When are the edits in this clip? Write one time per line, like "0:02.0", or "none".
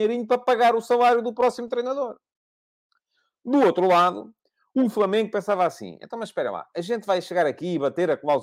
none